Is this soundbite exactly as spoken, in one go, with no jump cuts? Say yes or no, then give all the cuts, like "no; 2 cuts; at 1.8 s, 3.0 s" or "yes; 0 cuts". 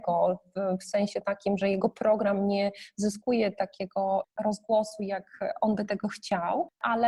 yes; 0 cuts